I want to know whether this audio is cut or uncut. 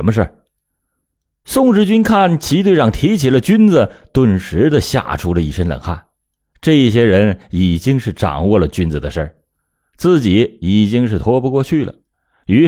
cut